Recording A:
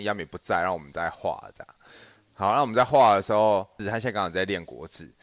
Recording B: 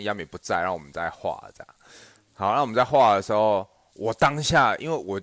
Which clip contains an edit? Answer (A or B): A